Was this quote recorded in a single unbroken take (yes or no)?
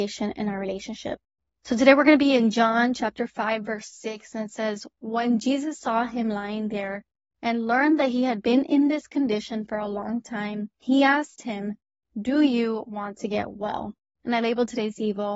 yes